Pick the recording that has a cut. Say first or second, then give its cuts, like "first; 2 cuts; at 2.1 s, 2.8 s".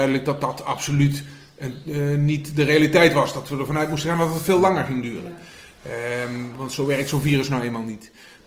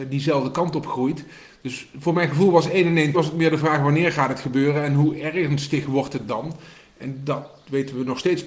second; 1 cut; at 3.1 s